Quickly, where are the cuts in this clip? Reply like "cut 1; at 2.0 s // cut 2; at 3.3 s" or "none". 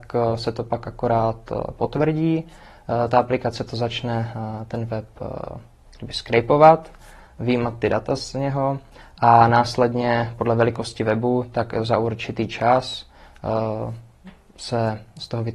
none